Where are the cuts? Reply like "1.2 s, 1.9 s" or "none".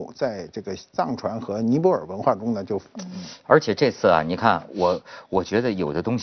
2.9 s